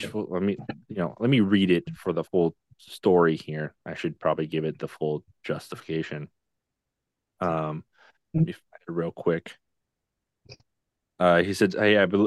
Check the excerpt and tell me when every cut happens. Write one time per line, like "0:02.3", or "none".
0:02.3